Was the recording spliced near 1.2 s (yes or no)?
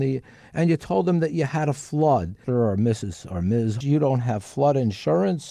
no